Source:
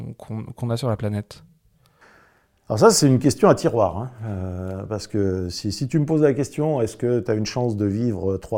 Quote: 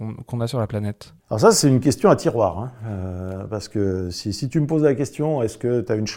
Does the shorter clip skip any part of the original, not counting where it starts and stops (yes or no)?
yes